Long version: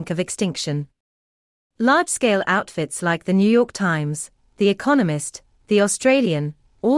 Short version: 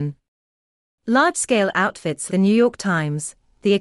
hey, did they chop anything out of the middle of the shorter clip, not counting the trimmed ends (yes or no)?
yes